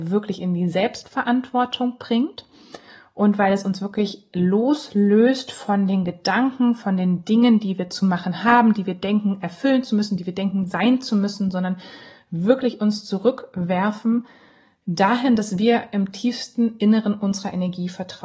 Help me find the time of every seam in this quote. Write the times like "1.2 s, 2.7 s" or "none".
none